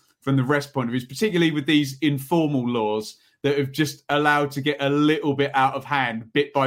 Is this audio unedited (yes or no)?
yes